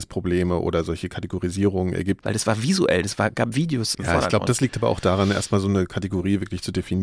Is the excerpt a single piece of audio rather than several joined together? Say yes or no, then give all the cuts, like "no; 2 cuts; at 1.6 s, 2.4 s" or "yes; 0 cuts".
no; 2 cuts; at 2.2 s, 3.9 s